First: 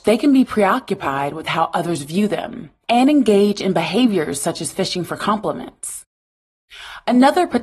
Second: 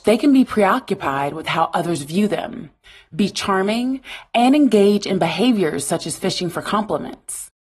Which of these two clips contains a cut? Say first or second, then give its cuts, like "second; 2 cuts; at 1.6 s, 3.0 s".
first; 1 cut; at 2.8 s